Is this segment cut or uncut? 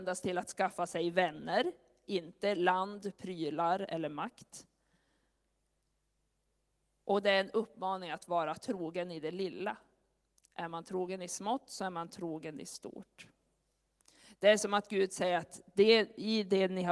uncut